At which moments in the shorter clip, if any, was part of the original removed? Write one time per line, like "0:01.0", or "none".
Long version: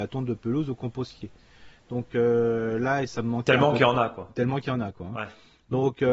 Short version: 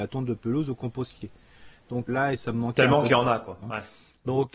0:02.1
0:03.6